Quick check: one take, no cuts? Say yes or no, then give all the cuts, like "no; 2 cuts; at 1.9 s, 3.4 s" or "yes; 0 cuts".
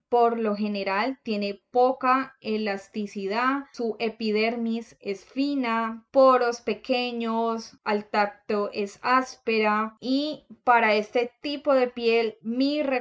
no; 1 cut; at 6.1 s